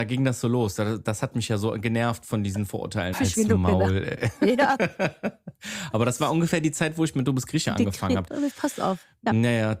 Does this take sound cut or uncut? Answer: cut